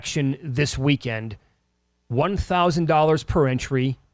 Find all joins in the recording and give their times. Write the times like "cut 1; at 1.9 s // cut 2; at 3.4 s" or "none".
none